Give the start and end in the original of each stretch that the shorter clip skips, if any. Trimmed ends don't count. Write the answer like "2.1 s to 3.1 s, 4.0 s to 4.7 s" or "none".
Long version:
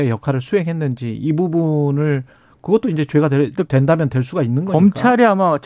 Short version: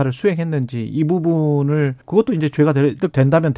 2.3 s to 2.6 s